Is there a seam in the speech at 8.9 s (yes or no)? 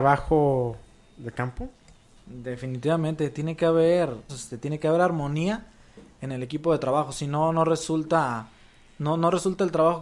no